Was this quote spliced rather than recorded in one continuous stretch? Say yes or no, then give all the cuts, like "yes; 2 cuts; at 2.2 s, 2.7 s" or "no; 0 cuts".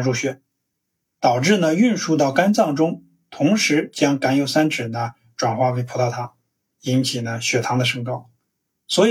yes; 1 cut; at 6.7 s